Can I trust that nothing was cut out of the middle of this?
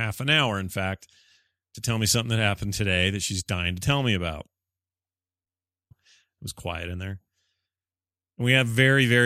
no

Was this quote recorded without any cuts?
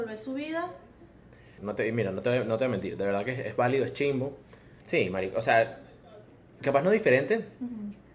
no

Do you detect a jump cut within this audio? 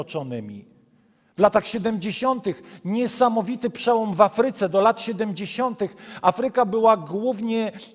no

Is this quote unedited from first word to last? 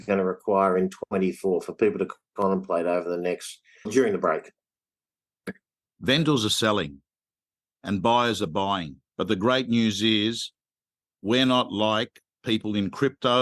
no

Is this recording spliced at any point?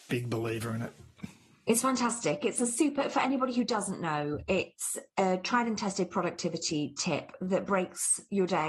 no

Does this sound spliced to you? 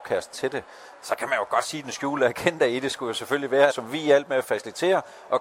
yes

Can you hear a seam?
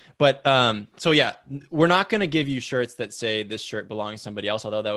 no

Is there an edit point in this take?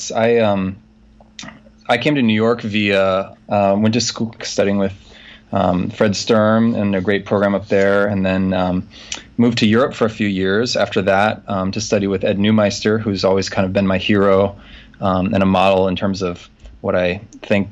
yes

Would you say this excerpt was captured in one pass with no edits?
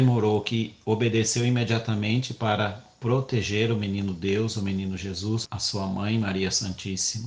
no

